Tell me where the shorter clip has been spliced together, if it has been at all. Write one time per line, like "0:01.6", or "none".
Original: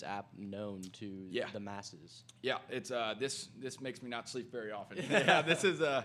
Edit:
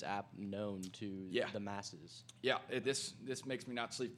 0:02.8

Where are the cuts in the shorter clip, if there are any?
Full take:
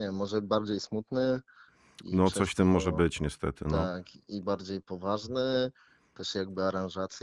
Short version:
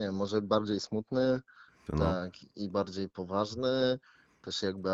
0:01.9

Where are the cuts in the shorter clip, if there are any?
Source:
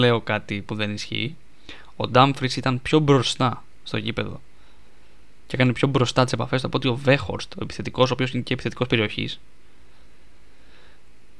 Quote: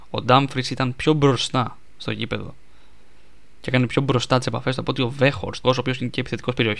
0:05.6

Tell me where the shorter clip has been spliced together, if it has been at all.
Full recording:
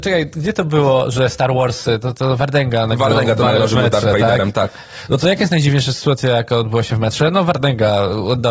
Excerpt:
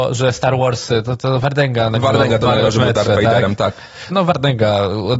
0:04.1

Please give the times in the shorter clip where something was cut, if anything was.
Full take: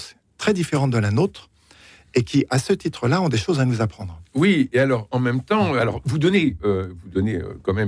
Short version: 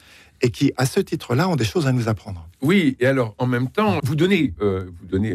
0:04.0

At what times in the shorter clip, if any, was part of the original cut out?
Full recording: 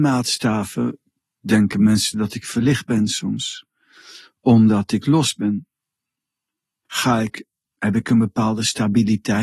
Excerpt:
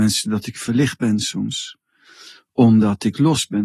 none

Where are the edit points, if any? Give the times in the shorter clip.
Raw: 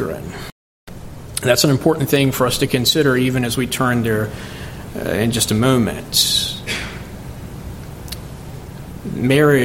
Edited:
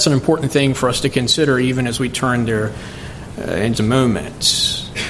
0:03.7

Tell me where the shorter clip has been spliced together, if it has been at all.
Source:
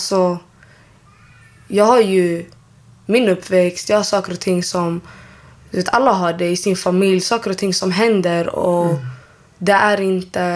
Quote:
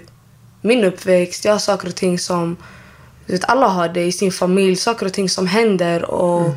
none

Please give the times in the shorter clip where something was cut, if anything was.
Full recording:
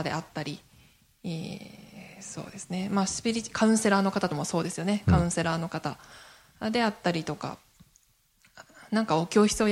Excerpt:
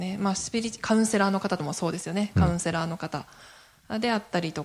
none

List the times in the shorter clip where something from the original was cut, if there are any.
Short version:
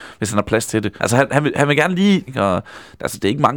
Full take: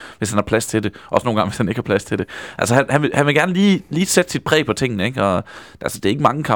0:01.0
0:02.3

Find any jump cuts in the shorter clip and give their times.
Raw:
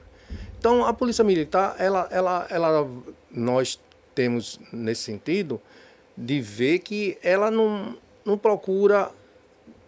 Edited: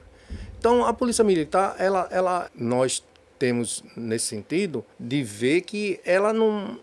0:02.5
0:04.9

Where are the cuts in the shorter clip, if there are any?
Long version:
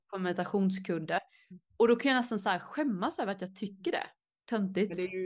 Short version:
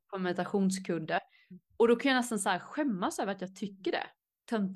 none

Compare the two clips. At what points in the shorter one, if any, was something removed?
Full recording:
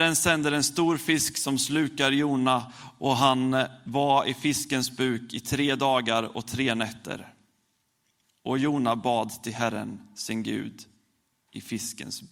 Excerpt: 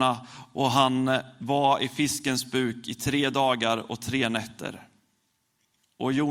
none

